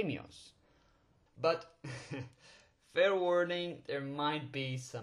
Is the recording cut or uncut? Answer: cut